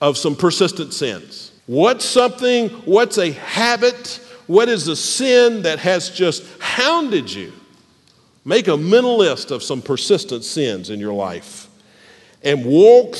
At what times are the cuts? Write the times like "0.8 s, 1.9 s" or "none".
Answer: 1.6 s